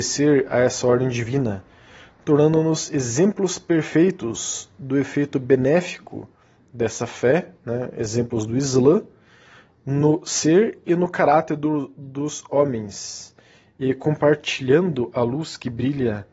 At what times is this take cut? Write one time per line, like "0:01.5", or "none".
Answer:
none